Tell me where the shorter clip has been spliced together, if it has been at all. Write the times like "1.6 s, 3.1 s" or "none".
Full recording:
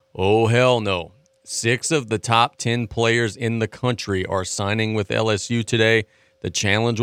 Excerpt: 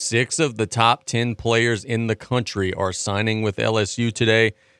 none